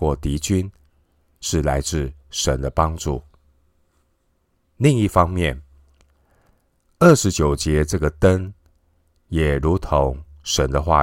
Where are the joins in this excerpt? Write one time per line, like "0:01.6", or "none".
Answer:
0:04.6